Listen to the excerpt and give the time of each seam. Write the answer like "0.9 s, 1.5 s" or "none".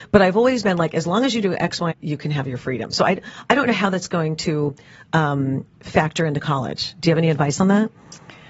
1.9 s